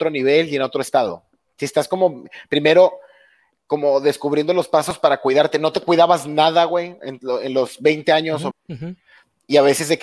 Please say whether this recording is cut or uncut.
cut